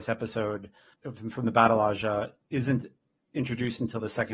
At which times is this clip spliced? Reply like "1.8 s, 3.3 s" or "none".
0.9 s